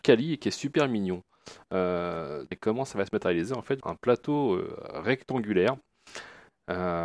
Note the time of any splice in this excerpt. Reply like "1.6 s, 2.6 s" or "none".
2.5 s, 3.8 s

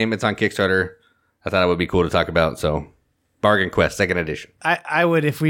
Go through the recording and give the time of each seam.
none

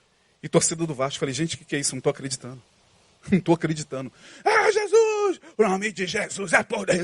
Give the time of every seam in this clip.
none

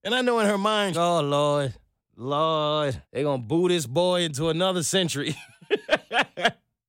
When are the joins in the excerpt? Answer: 0.9 s, 3.0 s

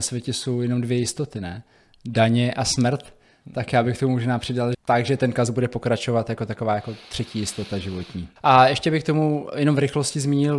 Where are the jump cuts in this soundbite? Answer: 4.7 s

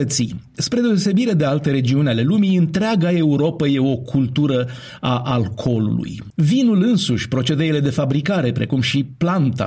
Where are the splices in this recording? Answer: none

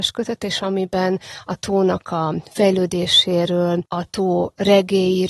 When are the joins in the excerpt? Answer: 3.9 s

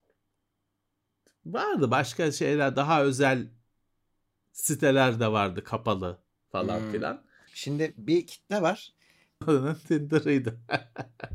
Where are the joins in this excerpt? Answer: 7.5 s, 9.4 s

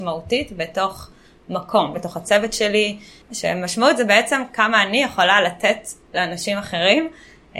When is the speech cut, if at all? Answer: 1.9 s, 3.3 s

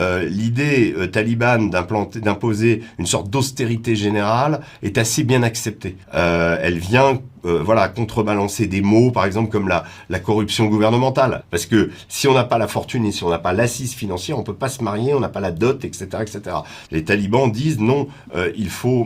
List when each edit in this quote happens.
6.0 s, 11.4 s, 16.9 s

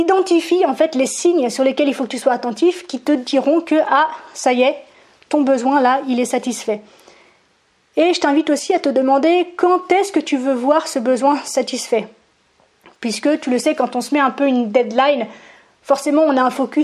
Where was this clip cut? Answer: none

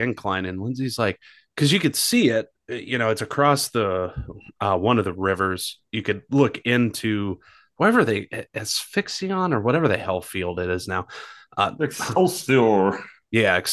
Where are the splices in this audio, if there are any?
none

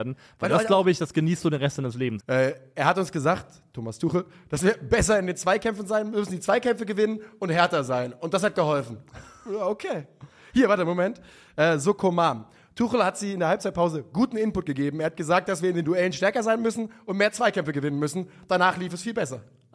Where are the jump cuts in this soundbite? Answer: 2.2 s

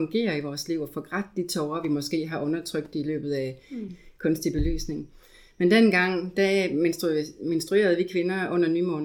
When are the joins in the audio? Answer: 3.9 s

